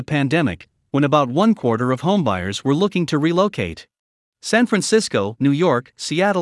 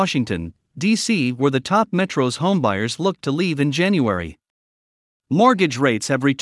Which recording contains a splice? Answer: first; 2 cuts; at 4.2 s, 5.4 s

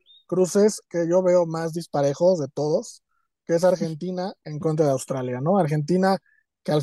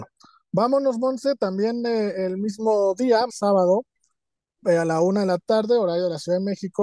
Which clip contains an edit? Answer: second; 1 cut; at 3.3 s

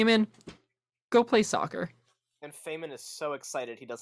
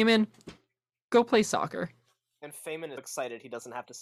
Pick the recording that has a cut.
second; 1 cut; at 3.0 s

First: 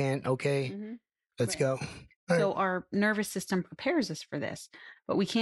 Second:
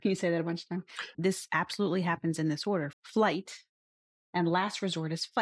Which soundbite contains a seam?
second; 2 cuts; at 1.1 s, 2.9 s

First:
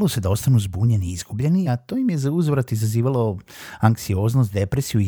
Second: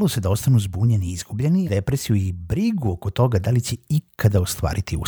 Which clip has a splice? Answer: second; 1 cut; at 1.7 s

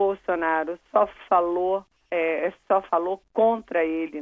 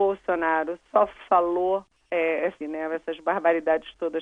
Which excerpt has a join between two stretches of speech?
second; 1 cut; at 2.6 s

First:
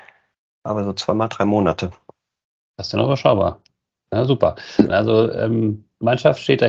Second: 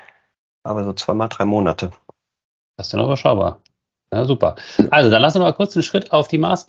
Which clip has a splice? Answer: first; 1 cut; at 4.9 s

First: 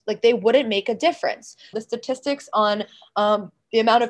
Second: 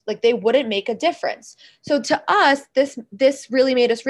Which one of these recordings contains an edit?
first; 1 cut; at 1.7 s

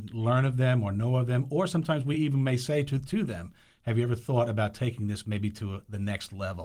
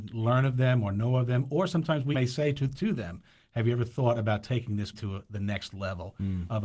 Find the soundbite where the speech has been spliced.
second; 2 cuts; at 2.1 s, 4.9 s

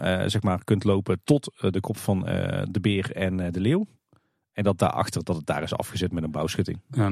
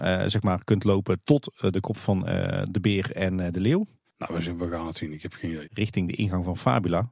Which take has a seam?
second; 2 cuts; at 4.0 s, 5.6 s

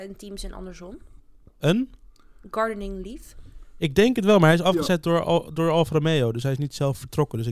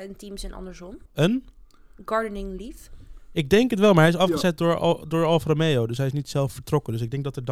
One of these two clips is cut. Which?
second; 1 cut; at 1.1 s

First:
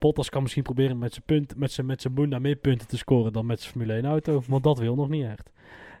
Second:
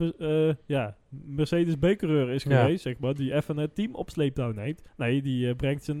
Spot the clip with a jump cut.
second; 1 cut; at 4.9 s

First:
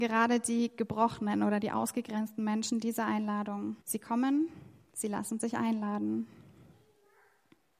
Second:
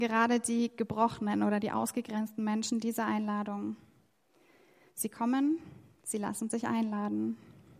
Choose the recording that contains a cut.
first; 1 cut; at 3.8 s

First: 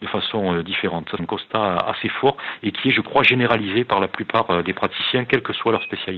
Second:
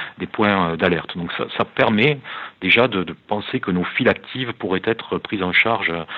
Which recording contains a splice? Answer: first; 1 cut; at 1.2 s

